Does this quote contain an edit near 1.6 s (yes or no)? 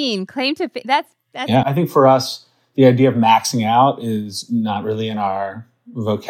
yes